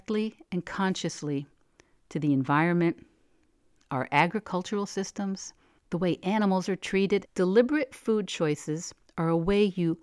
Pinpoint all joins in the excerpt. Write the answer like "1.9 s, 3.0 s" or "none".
5.8 s, 7.3 s